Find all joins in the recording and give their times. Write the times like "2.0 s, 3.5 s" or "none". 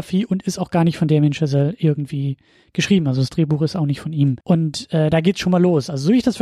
4.4 s